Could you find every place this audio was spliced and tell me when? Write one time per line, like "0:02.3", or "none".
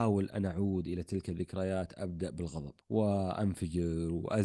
0:02.8